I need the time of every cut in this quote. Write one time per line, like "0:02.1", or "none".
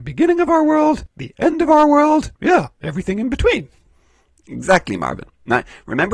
0:02.4